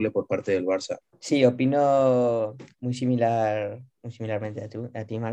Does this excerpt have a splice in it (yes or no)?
yes